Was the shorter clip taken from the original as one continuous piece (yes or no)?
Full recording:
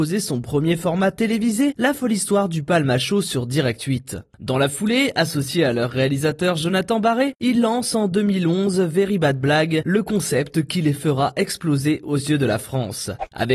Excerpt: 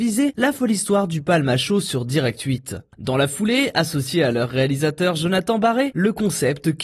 no